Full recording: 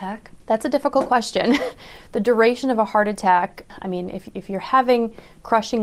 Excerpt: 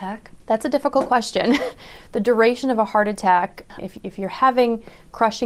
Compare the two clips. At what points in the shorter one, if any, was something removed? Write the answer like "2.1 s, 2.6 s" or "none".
3.8 s